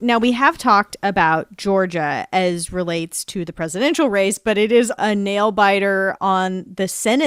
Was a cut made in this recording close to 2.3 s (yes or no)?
no